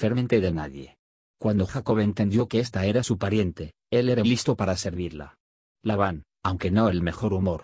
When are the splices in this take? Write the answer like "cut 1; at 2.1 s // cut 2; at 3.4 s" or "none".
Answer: cut 1; at 4.2 s